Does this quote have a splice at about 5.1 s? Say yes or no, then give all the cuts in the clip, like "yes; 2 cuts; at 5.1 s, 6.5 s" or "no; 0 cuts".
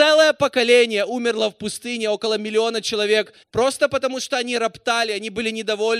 no; 1 cut; at 3.4 s